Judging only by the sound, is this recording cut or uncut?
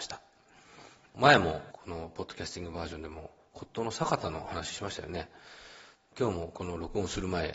uncut